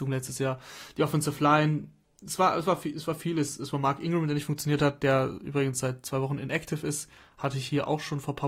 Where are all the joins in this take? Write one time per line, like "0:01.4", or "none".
none